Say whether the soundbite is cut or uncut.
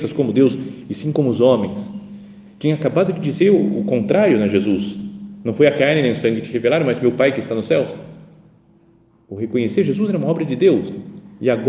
uncut